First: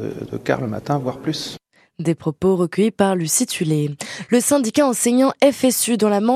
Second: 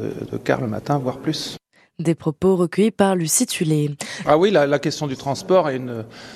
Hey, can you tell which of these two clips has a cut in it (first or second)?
second